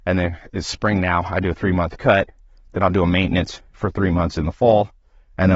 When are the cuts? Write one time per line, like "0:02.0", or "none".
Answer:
none